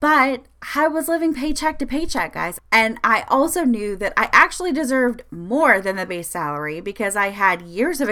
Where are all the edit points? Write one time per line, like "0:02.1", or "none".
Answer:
0:02.6